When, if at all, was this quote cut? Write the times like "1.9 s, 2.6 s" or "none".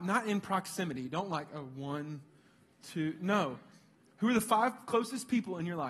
none